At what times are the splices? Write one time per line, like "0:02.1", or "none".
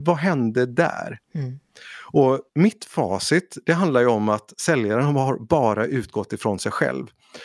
0:02.5